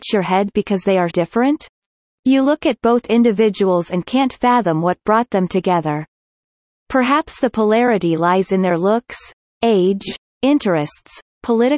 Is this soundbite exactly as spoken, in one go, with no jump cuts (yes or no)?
no